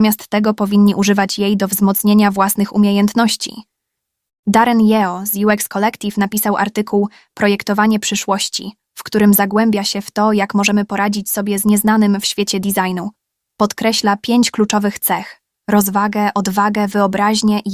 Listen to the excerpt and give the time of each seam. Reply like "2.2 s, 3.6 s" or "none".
none